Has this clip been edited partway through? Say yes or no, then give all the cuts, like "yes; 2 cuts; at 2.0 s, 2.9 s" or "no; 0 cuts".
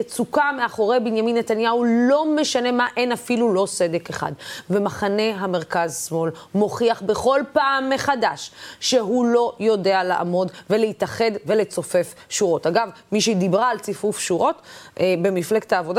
no; 0 cuts